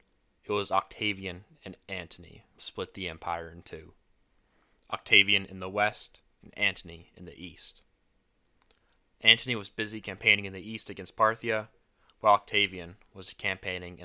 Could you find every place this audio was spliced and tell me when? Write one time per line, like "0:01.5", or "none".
0:02.6
0:09.0